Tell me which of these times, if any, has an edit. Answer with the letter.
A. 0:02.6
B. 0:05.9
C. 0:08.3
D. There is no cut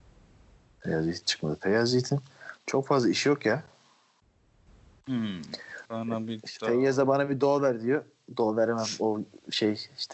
B